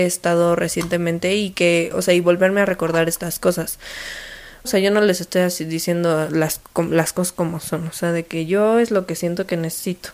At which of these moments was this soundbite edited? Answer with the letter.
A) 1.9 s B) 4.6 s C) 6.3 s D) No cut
B